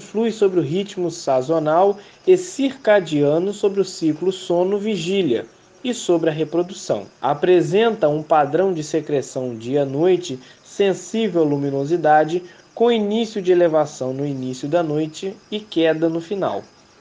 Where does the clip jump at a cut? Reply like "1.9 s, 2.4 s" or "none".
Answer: 7.1 s